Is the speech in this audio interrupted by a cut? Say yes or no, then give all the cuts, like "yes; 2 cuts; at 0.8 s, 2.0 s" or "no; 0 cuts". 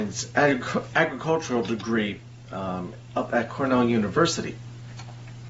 no; 0 cuts